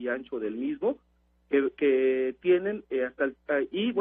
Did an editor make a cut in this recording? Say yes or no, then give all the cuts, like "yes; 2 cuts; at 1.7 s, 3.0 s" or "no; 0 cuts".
no; 0 cuts